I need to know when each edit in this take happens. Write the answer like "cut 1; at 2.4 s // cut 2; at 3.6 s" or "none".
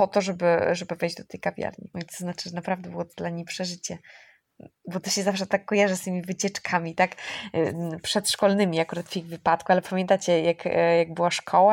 cut 1; at 1.9 s